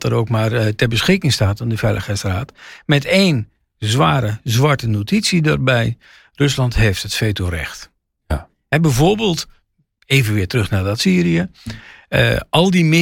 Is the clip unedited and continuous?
yes; 0 cuts

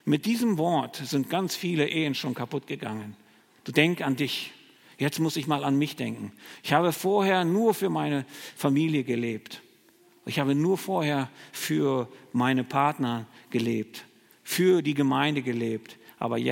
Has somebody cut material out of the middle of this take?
no; 0 cuts

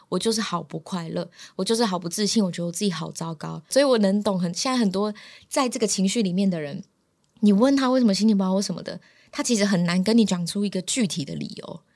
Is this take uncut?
no; 1 cut; at 3.7 s

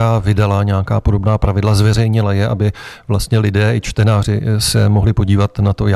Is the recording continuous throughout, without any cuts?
yes; 0 cuts

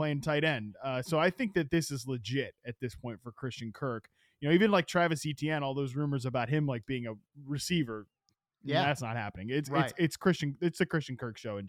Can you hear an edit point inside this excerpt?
no; 0 cuts

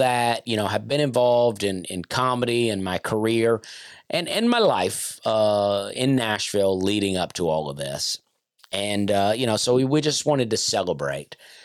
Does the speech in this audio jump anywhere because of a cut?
no; 0 cuts

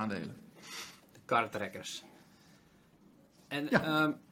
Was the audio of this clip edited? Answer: no; 0 cuts

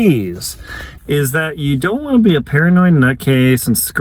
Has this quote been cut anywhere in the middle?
yes; 1 cut; at 1.0 s

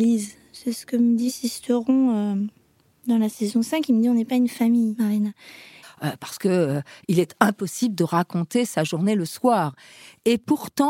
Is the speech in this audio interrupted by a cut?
yes; 1 cut; at 5.8 s

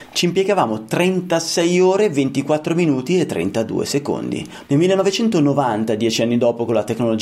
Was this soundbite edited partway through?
yes; 1 cut; at 4.7 s

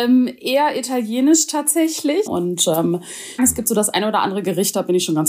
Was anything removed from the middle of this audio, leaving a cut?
yes; 2 cuts; at 2.3 s, 3.4 s

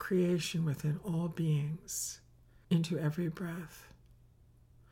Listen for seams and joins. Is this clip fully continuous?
no; 1 cut; at 2.6 s

